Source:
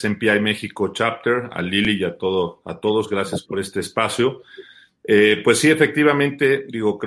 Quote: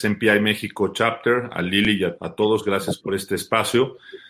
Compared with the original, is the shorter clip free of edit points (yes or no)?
no